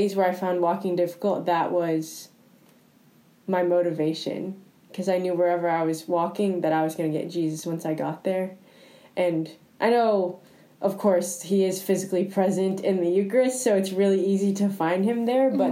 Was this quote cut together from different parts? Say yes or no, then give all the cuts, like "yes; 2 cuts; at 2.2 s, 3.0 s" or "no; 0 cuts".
no; 0 cuts